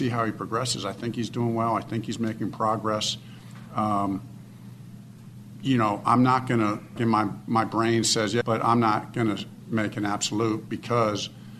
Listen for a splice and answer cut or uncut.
cut